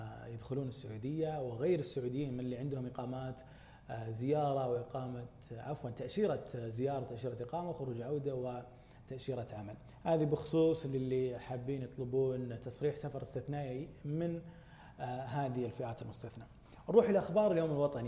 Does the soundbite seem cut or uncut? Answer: cut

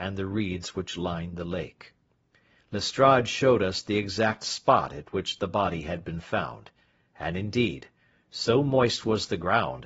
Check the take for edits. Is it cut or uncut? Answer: uncut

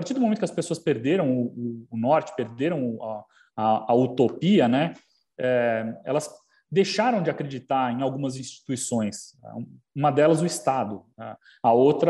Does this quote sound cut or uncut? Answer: uncut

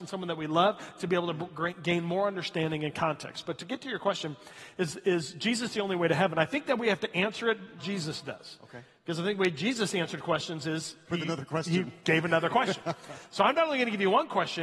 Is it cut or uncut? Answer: cut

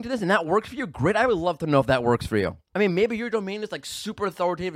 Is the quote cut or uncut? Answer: cut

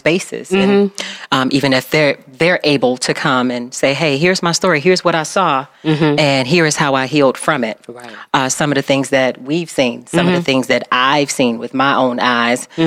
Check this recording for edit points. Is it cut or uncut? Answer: uncut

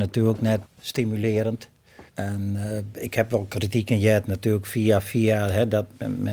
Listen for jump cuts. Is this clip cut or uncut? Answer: cut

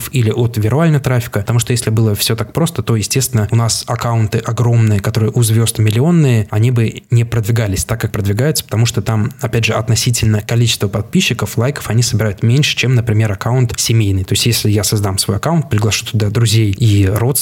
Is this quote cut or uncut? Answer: uncut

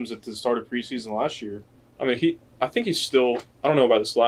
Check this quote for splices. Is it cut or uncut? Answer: uncut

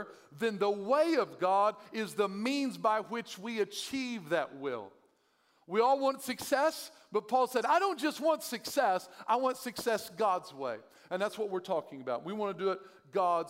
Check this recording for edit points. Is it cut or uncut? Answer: uncut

